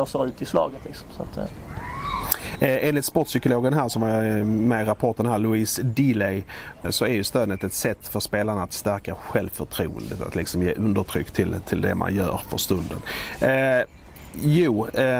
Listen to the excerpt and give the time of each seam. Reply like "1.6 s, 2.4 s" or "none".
6.8 s